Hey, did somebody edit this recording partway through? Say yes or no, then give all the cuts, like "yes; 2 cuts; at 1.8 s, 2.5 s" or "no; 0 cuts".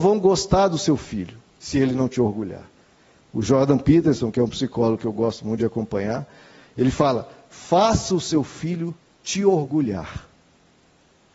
yes; 1 cut; at 3.1 s